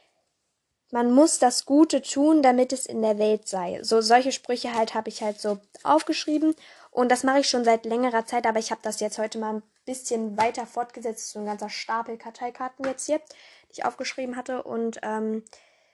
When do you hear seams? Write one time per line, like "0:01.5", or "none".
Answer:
none